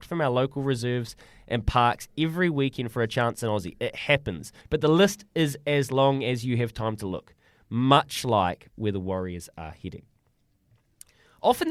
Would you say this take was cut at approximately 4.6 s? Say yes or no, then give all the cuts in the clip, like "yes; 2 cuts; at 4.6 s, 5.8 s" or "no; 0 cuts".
yes; 1 cut; at 4.6 s